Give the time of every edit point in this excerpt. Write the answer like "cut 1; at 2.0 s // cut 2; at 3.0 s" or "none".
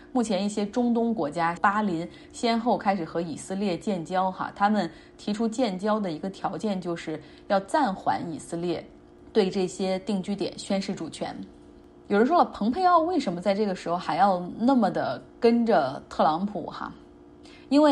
cut 1; at 1.6 s